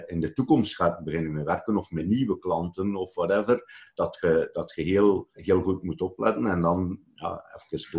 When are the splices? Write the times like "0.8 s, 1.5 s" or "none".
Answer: 4.0 s, 5.4 s

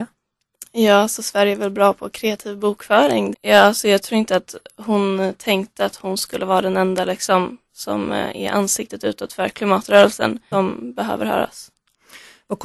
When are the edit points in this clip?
3.3 s, 10.5 s

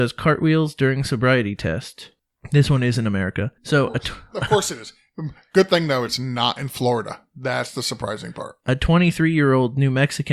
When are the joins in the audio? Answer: 3.6 s

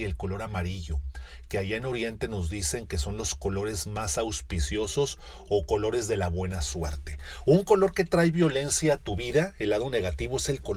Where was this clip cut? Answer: none

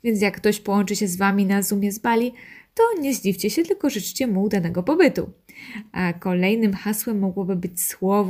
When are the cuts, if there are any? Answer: none

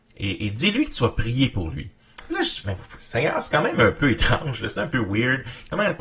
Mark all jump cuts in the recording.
none

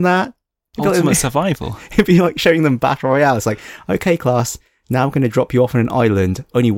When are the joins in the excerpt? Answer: none

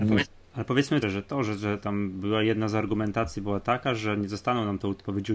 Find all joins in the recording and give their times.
1.0 s

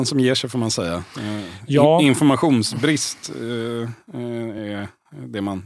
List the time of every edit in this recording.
none

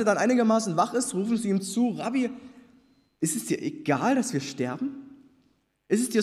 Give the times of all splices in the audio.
none

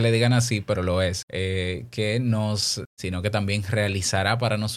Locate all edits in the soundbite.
1.2 s, 2.9 s

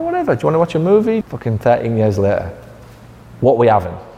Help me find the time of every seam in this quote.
1.2 s

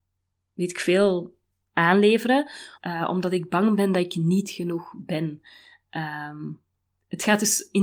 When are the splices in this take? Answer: 2.7 s

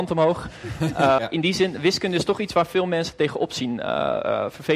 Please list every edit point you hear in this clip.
1.2 s

